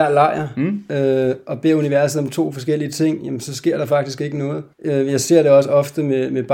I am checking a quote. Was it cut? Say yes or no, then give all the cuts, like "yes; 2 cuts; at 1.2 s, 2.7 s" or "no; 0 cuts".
yes; 1 cut; at 4.7 s